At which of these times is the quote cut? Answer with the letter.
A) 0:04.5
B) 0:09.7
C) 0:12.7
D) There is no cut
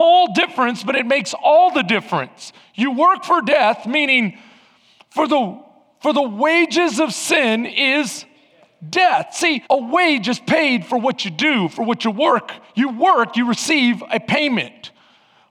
B